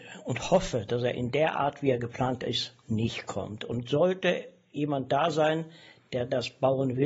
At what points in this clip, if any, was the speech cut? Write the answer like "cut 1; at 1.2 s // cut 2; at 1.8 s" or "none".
none